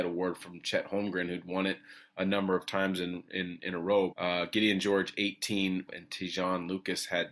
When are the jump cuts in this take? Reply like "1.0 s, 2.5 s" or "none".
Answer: 4.1 s, 5.9 s